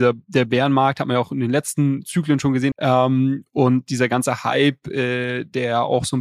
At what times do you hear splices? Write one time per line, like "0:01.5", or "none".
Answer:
0:02.7